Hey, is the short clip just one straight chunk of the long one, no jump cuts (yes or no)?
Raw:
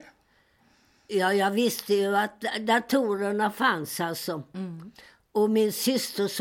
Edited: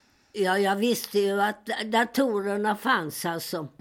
yes